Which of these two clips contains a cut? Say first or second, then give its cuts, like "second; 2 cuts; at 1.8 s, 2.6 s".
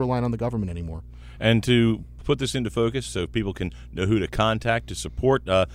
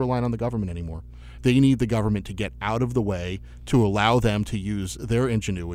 second; 1 cut; at 1.4 s